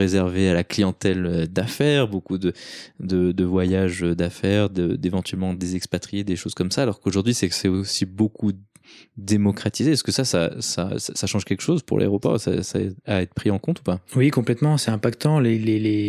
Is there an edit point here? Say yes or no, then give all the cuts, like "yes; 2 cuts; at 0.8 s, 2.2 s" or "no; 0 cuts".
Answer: no; 0 cuts